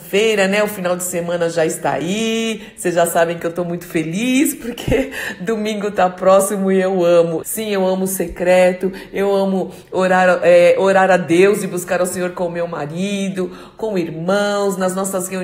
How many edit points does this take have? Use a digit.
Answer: 1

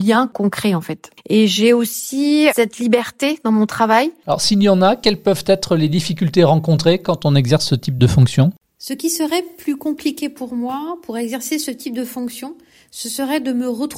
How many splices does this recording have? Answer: 2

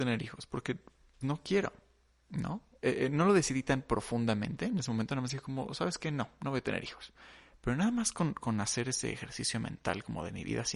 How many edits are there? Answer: 1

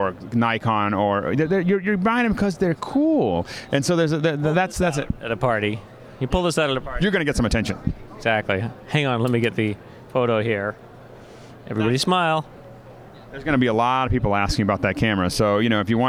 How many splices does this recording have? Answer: 0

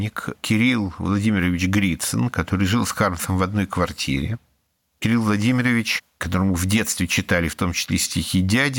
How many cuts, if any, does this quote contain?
0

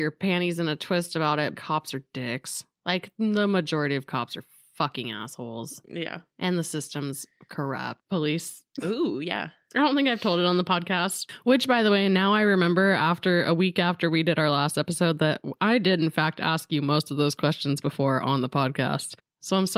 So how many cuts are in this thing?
2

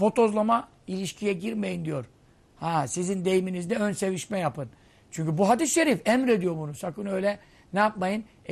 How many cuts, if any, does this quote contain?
0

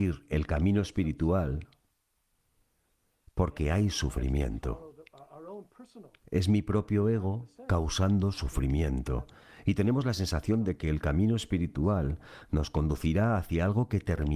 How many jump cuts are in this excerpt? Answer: 1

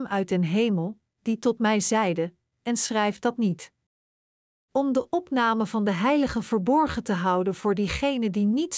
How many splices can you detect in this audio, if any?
1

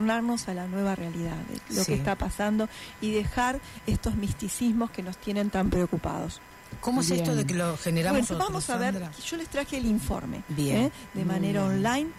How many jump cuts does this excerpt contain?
2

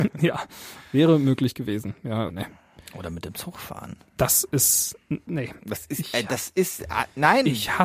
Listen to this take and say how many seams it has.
1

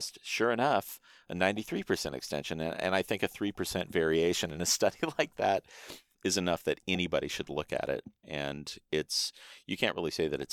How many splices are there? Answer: 1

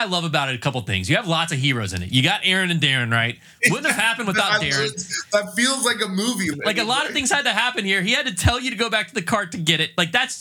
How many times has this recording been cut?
1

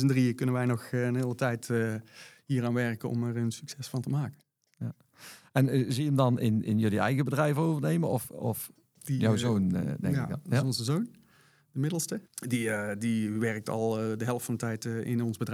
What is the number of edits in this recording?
2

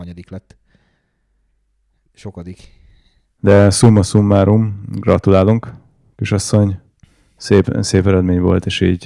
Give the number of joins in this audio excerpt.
0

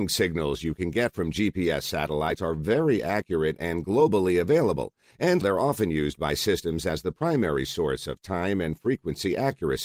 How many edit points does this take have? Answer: 1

